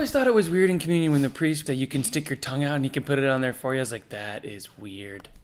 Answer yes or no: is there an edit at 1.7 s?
yes